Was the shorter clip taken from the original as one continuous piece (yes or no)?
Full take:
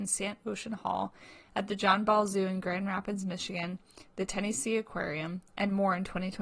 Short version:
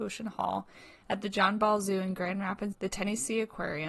no